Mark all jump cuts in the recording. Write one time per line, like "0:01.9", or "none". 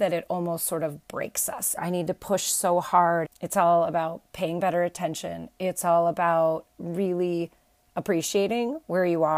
0:01.8
0:03.2